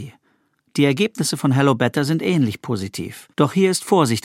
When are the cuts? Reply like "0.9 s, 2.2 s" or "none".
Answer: 3.3 s